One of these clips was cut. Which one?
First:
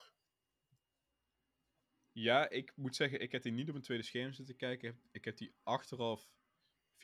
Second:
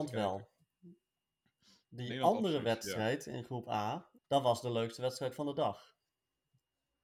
second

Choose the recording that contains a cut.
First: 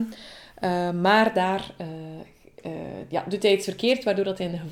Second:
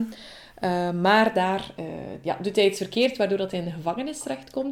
second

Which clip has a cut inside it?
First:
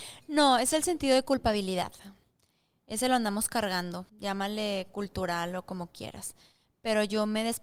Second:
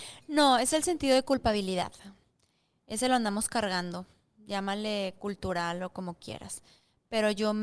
first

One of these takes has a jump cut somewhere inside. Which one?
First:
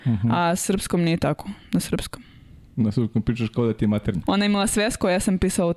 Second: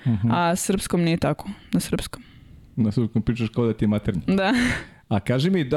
first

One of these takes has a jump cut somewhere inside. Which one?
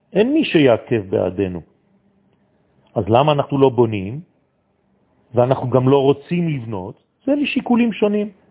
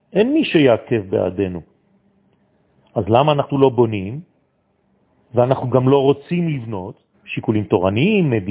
second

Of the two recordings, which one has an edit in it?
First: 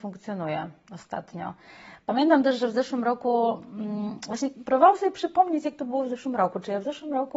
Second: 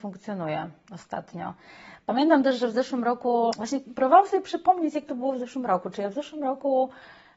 second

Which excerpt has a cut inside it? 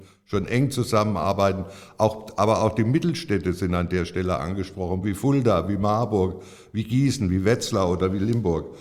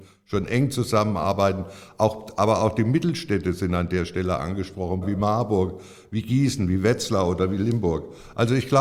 second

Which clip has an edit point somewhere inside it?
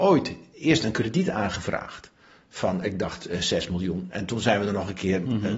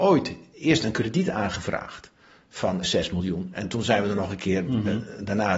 second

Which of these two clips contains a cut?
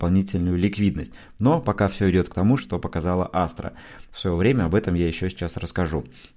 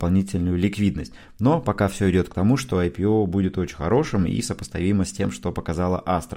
first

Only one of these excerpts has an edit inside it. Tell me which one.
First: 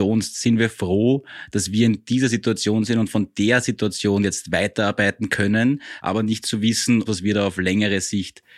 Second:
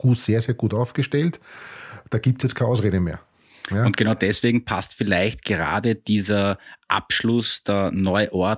first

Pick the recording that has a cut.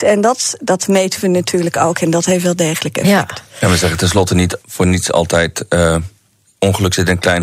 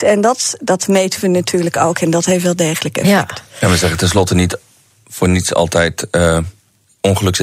first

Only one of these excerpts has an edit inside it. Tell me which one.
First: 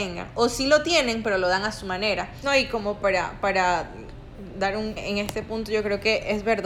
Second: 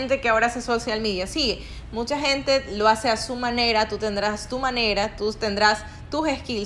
first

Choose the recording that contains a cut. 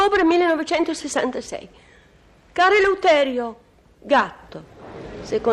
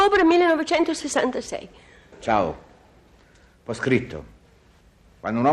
second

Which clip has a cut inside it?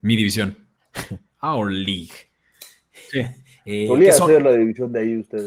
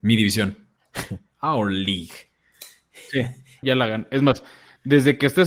second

